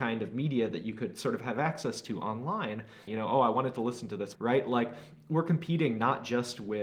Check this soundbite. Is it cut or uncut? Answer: cut